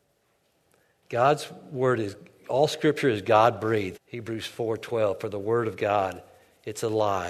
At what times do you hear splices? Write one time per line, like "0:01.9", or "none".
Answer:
0:03.9